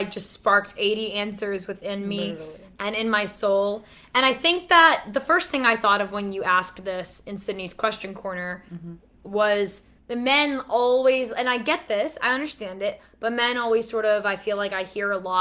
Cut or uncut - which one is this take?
uncut